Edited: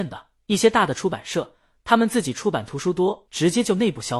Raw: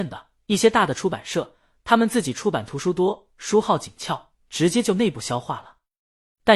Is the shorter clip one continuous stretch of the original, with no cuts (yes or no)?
no